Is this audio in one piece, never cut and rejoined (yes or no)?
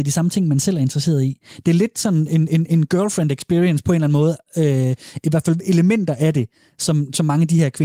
yes